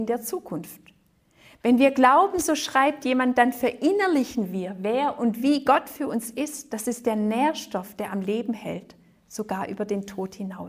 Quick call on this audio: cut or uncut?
uncut